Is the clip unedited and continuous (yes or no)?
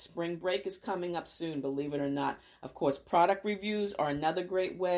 yes